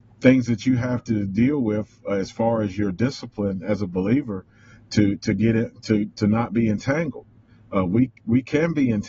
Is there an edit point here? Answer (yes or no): no